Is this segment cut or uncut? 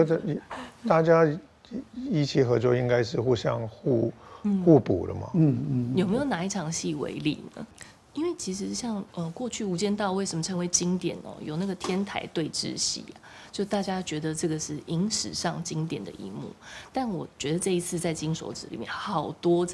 uncut